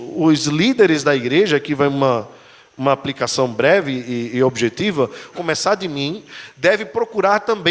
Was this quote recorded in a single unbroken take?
no; 1 cut; at 5.3 s

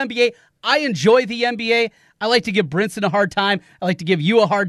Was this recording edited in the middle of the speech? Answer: no; 0 cuts

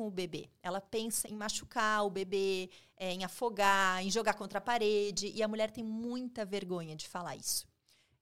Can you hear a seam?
yes; 1 cut; at 1.2 s

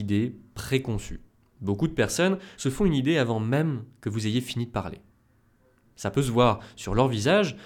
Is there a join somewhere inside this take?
yes; 1 cut; at 2.5 s

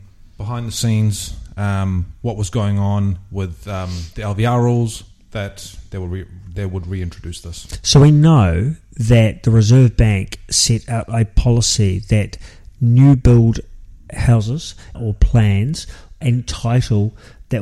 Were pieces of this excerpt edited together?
yes; 2 cuts; at 14.9 s, 16.2 s

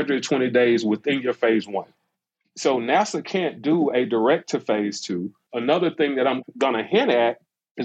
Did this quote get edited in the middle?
yes; 1 cut; at 5.5 s

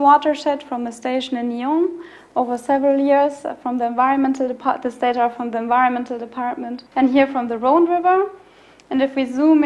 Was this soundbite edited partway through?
yes; 1 cut; at 6.9 s

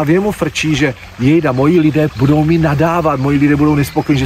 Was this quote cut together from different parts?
yes; 1 cut; at 2.1 s

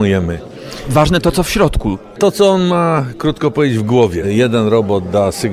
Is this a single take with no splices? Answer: no; 1 cut; at 4.2 s

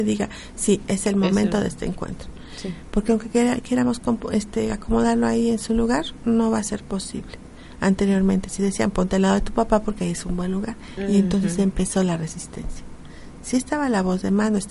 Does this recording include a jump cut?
no; 0 cuts

